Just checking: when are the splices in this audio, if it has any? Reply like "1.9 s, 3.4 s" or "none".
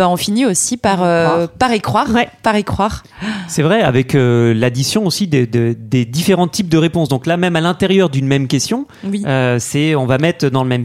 none